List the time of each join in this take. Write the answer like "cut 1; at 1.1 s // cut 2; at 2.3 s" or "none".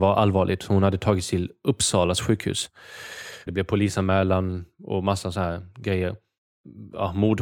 cut 1; at 3.5 s